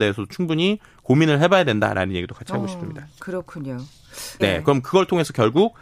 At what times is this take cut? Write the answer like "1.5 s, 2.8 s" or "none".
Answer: 4.4 s